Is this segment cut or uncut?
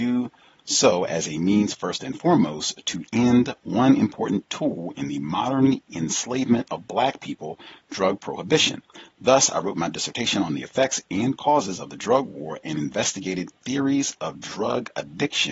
uncut